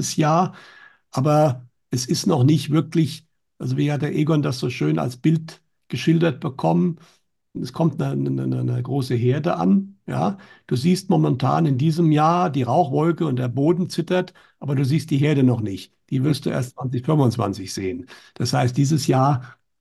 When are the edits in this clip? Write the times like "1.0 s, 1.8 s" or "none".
none